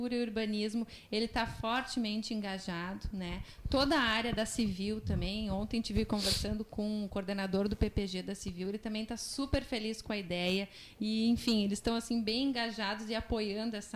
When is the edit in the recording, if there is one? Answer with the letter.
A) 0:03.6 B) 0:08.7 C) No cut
C